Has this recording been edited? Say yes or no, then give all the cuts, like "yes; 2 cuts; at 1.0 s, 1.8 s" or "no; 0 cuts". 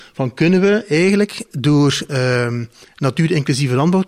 yes; 1 cut; at 2.1 s